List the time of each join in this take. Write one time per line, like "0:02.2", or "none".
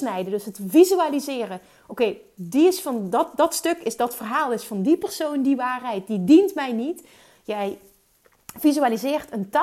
none